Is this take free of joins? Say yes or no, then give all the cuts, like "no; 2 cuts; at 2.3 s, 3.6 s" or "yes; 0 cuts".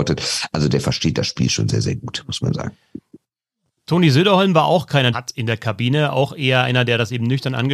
no; 1 cut; at 5.1 s